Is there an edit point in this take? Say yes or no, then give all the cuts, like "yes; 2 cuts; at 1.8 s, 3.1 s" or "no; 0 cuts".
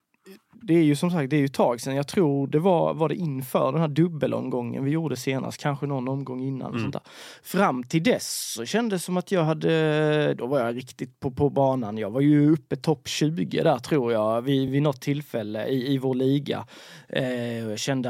no; 0 cuts